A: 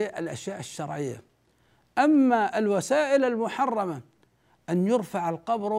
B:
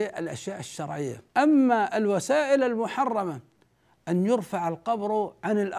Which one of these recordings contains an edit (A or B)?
B